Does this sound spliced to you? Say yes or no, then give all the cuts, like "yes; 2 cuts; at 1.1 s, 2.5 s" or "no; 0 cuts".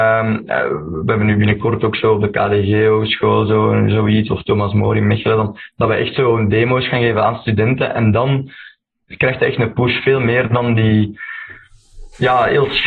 no; 0 cuts